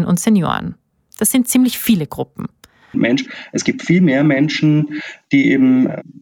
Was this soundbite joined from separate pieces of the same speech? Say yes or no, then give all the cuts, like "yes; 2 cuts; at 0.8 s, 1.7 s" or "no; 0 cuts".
yes; 1 cut; at 2.9 s